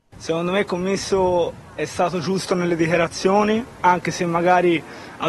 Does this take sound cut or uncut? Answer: uncut